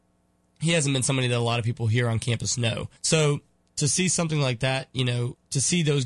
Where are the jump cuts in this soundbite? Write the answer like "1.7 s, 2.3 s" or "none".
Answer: 3.0 s